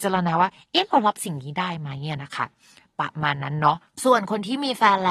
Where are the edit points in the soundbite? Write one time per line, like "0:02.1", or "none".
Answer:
none